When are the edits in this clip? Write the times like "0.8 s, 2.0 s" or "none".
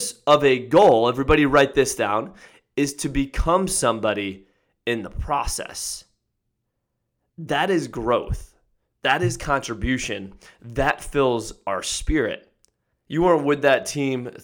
12.9 s